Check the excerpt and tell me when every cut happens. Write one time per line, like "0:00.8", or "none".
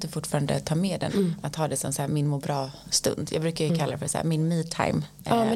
0:01.1